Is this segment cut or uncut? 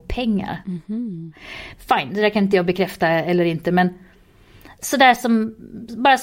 cut